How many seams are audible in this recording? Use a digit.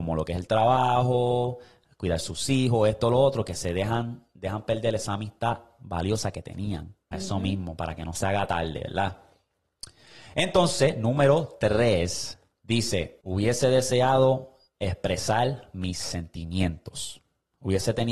1